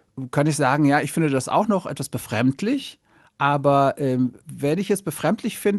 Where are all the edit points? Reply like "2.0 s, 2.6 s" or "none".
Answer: none

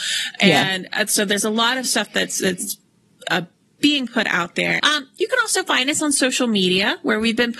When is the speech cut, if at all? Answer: 4.8 s

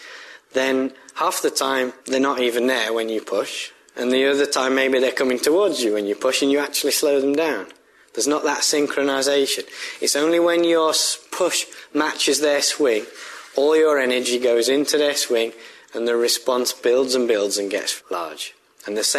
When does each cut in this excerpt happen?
2.0 s, 18.0 s

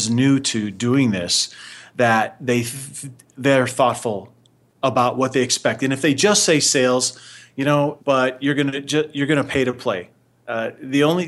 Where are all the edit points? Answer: 8.0 s

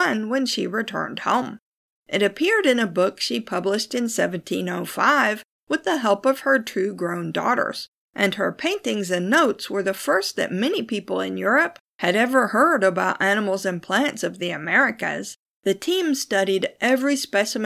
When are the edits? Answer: 15.4 s

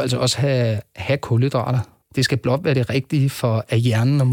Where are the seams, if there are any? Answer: 2.0 s

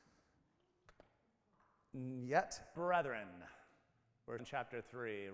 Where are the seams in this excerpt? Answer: 2.8 s, 4.4 s

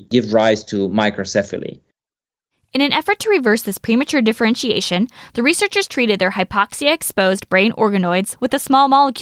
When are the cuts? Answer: none

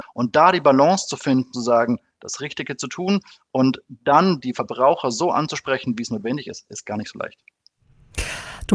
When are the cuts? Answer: none

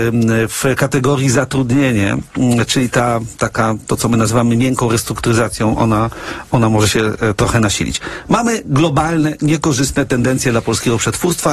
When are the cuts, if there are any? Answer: none

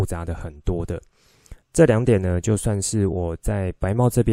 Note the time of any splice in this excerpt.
1.6 s

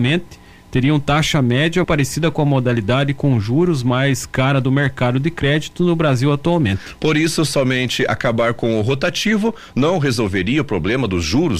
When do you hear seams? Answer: 1.8 s

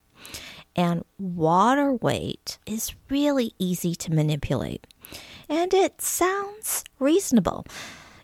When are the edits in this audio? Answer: 2.6 s, 5.4 s

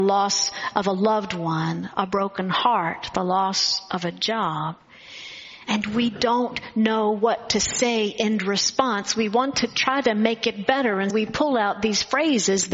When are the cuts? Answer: 11.1 s

